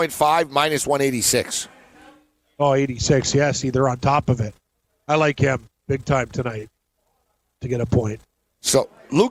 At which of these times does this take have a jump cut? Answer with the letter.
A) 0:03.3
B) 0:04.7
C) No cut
C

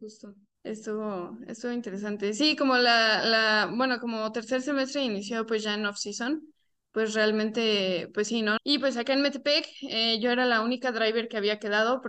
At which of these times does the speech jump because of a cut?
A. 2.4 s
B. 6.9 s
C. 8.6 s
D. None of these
C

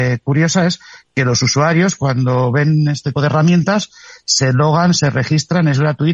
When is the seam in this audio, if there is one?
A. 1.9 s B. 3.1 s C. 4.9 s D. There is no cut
B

